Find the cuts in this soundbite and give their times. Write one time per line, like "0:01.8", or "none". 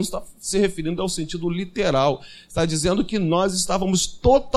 none